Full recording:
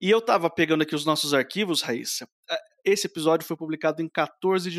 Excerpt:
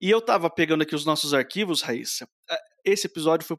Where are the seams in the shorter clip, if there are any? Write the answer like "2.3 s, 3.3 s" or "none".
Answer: none